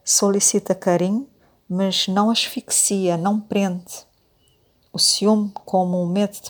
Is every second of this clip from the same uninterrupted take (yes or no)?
yes